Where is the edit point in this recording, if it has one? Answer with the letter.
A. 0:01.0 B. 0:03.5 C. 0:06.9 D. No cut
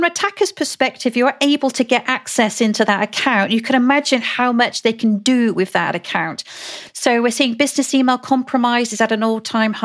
C